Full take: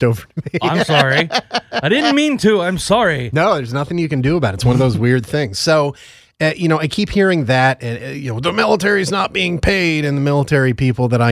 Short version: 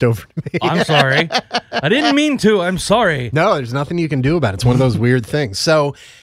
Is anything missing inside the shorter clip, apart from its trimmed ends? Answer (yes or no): no